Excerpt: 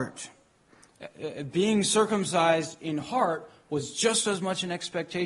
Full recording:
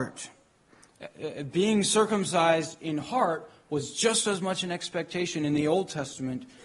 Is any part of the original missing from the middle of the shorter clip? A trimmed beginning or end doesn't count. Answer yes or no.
no